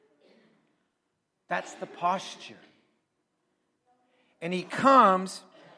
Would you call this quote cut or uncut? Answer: uncut